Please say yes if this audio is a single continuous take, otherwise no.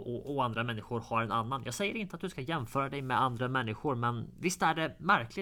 yes